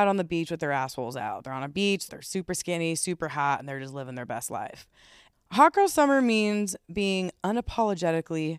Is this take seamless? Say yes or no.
no